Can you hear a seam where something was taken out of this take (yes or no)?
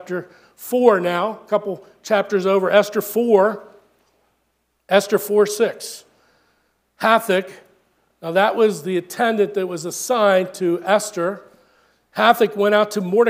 yes